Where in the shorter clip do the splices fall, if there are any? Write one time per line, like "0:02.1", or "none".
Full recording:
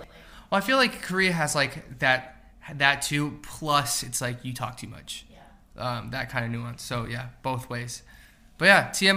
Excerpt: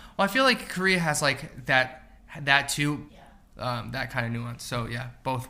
0:03.1